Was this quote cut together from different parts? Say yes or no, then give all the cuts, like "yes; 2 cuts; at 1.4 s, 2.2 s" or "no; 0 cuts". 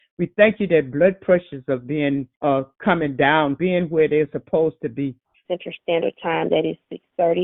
yes; 3 cuts; at 2.3 s, 3.6 s, 5.4 s